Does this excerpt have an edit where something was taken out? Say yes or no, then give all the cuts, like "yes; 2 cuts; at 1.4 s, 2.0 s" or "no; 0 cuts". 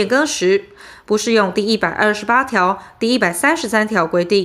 no; 0 cuts